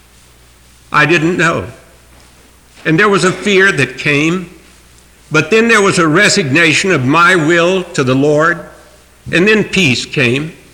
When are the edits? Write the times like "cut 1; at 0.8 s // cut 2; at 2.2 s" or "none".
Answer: none

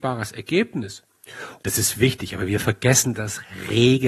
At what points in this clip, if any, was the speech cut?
cut 1; at 1.6 s

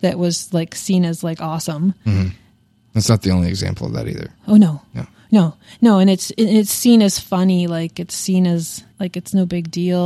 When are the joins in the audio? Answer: cut 1; at 8.9 s

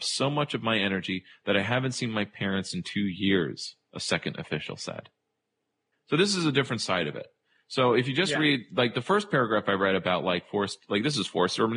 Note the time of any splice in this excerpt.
none

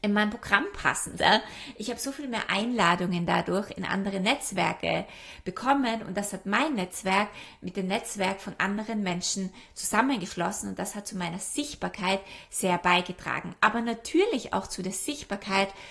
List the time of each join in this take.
cut 1; at 1.2 s

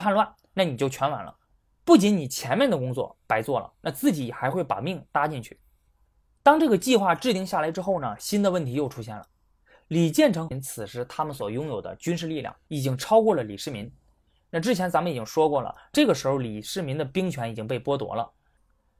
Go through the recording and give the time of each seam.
none

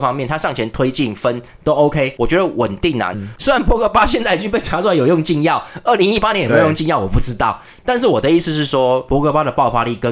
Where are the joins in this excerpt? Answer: cut 1; at 3.1 s

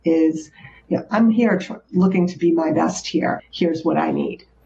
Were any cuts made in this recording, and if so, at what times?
cut 1; at 1.1 s // cut 2; at 3.4 s

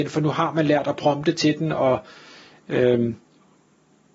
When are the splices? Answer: none

